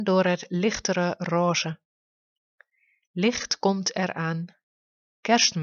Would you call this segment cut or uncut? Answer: uncut